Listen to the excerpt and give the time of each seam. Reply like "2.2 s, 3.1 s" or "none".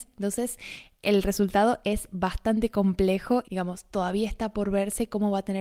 3.4 s